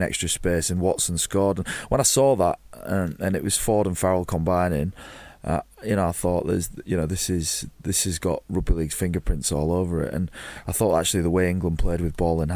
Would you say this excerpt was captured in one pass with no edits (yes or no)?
yes